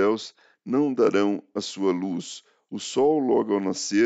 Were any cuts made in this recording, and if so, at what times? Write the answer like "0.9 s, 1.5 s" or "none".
none